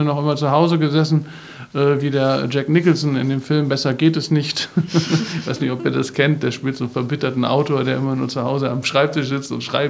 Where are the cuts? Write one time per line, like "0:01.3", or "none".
none